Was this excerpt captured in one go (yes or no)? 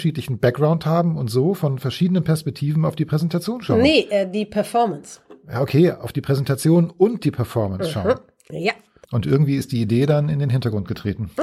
no